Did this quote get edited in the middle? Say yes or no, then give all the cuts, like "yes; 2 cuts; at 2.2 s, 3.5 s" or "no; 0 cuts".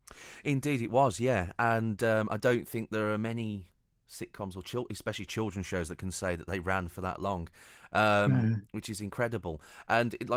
no; 0 cuts